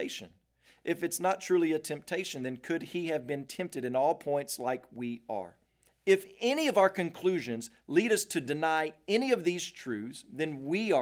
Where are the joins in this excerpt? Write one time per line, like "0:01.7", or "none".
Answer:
0:05.9